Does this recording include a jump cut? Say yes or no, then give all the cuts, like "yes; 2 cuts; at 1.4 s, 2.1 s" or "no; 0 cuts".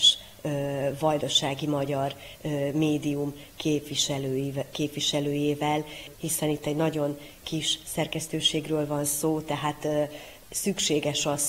yes; 1 cut; at 6.1 s